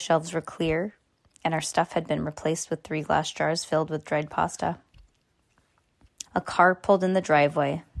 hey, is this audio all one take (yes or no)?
no